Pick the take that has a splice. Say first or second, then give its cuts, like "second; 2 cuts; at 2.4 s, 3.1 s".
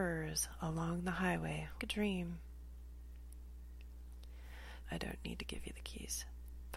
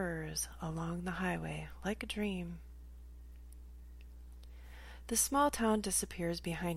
first; 2 cuts; at 1.8 s, 4.8 s